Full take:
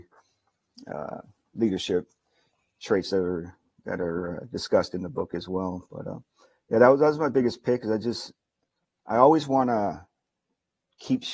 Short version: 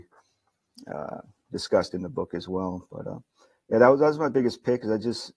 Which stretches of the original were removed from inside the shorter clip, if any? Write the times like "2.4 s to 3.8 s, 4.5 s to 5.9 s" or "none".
1.5 s to 4.5 s